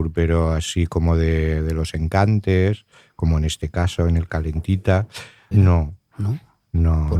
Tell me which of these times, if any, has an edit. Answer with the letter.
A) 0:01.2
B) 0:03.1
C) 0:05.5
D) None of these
C